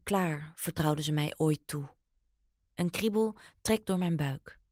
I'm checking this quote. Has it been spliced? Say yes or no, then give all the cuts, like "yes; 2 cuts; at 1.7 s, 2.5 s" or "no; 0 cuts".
yes; 1 cut; at 2.6 s